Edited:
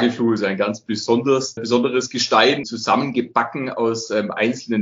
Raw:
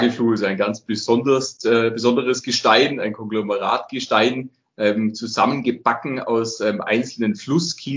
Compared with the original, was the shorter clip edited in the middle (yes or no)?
yes